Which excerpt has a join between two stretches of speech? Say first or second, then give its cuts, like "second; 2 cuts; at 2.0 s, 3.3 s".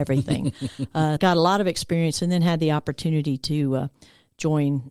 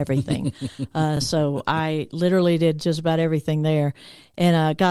first; 1 cut; at 1.2 s